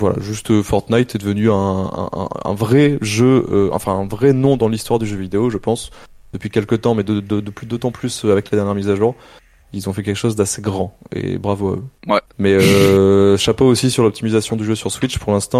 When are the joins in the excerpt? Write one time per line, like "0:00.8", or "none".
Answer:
0:12.3